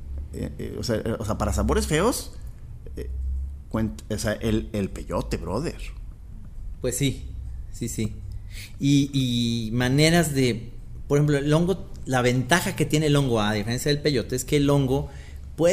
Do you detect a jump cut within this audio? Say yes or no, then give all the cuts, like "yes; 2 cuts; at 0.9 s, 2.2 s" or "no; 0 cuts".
no; 0 cuts